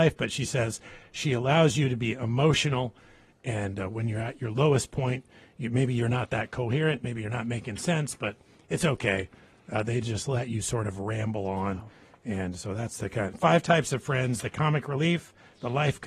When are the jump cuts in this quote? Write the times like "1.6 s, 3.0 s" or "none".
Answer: none